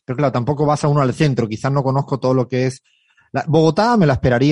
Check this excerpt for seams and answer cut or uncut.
uncut